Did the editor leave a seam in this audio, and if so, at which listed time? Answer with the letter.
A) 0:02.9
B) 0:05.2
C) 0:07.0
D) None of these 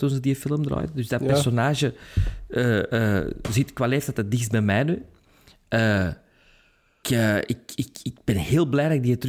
C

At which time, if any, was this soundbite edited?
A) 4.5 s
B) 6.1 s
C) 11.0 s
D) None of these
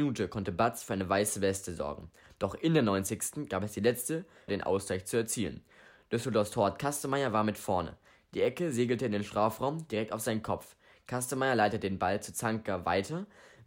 A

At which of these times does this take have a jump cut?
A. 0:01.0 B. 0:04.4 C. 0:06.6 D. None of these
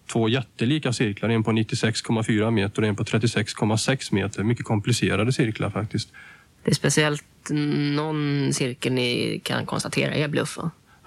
C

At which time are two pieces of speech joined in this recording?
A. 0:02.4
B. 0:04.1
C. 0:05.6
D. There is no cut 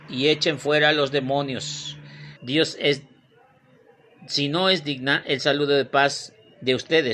A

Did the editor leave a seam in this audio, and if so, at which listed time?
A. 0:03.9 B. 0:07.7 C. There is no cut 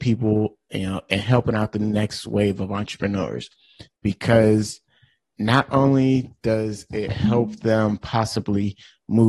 A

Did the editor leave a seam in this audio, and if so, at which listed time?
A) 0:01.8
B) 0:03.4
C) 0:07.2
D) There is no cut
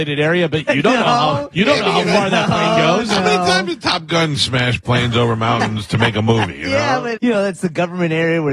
C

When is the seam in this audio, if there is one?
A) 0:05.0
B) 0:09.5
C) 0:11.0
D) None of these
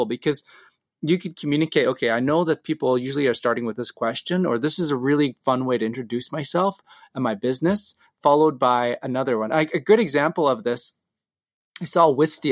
D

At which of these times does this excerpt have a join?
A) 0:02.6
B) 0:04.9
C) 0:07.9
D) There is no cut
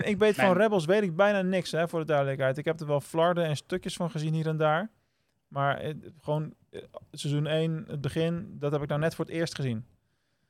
D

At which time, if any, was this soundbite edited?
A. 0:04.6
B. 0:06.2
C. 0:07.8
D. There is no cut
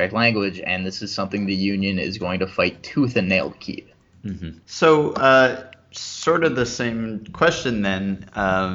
A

